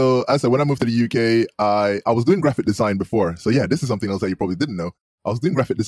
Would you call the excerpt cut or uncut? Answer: uncut